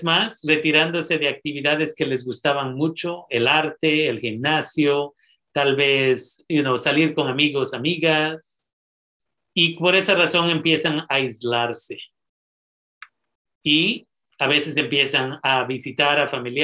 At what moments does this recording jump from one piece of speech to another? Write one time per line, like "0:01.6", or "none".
none